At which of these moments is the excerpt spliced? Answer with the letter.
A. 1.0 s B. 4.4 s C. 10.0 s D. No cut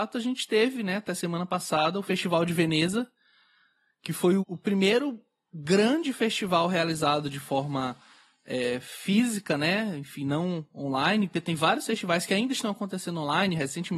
B